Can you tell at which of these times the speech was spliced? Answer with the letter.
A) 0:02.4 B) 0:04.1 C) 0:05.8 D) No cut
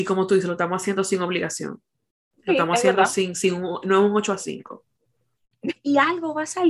C